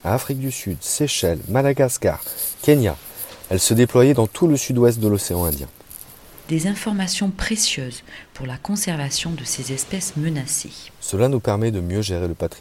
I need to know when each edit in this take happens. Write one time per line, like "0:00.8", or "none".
none